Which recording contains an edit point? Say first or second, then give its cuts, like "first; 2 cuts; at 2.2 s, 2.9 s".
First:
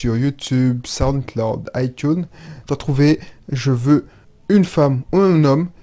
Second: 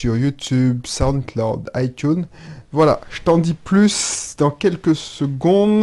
first; 1 cut; at 2.6 s